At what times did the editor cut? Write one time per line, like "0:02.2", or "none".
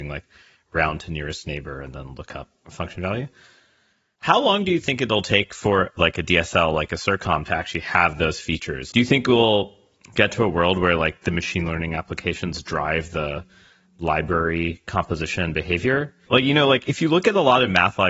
0:08.9
0:16.3